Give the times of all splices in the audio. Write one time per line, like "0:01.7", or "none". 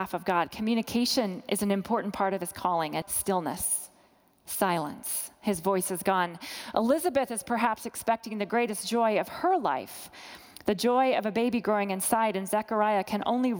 0:03.0